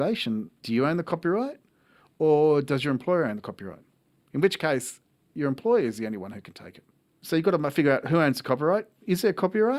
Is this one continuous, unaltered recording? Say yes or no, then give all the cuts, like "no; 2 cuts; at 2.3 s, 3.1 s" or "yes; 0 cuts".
yes; 0 cuts